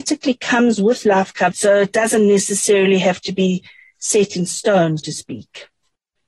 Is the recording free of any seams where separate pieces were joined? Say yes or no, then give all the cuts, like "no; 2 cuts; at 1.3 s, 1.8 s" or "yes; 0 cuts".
no; 2 cuts; at 1.5 s, 5.0 s